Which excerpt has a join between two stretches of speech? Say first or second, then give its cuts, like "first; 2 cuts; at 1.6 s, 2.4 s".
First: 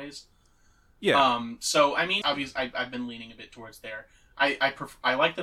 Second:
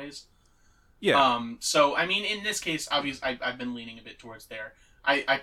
first; 1 cut; at 2.2 s